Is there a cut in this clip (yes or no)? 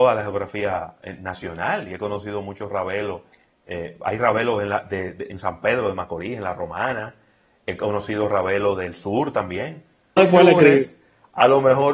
yes